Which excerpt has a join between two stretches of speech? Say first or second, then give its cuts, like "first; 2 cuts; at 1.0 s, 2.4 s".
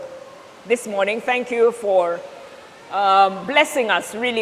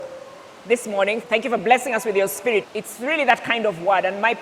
second; 2 cuts; at 1.2 s, 2.6 s